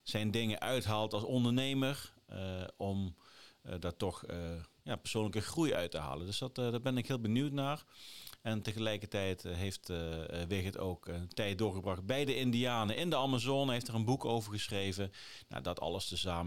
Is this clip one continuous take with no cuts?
yes; 0 cuts

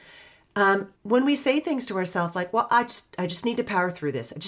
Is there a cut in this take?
yes; 1 cut; at 1.0 s

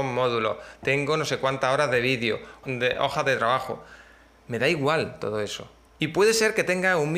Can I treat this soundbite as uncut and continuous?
no; 2 cuts; at 2.6 s, 5.9 s

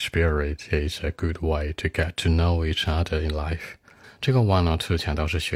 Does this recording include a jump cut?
yes; 1 cut; at 4.0 s

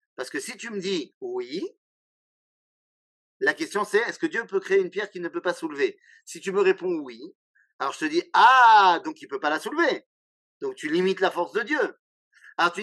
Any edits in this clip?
no; 0 cuts

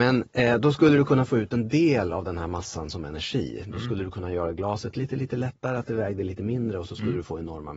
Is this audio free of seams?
yes; 0 cuts

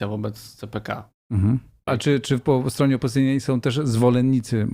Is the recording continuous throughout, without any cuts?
no; 1 cut; at 1.9 s

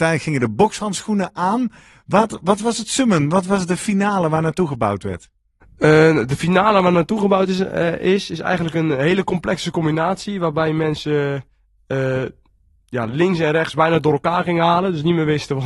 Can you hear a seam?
no; 0 cuts

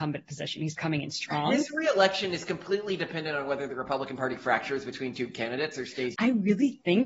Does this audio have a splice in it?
yes; 1 cut; at 6.1 s

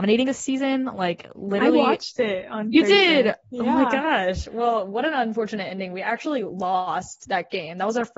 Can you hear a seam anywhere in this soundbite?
no; 0 cuts

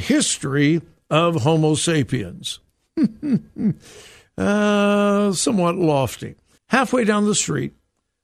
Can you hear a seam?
yes; 1 cut; at 6.6 s

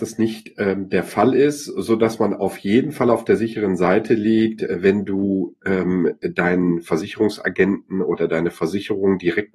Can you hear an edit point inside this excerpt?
no; 0 cuts

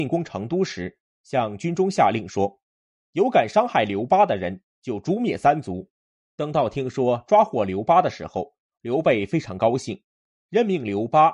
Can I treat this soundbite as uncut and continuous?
yes; 0 cuts

